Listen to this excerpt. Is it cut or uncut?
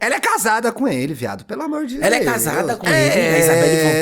uncut